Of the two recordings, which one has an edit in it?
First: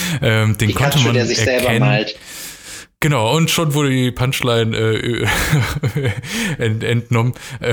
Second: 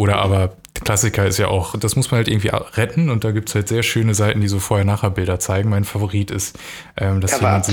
second; 1 cut; at 1.7 s

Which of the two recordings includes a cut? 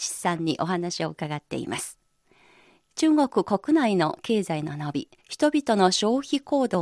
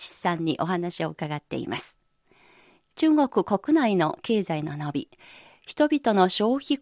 first; 1 cut; at 5.2 s

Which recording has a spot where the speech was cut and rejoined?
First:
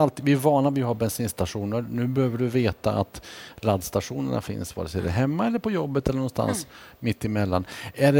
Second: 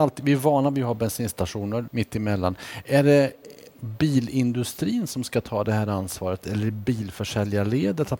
second; 1 cut; at 1.9 s

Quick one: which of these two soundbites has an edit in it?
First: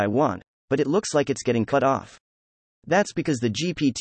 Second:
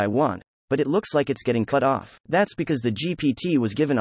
second; 1 cut; at 2.2 s

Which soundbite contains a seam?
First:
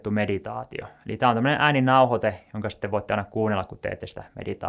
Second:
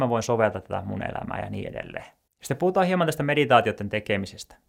second; 1 cut; at 2.3 s

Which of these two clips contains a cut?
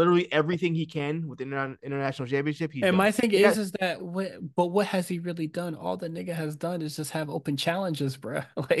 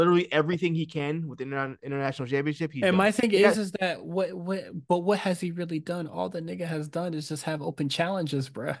first; 1 cut; at 4.0 s

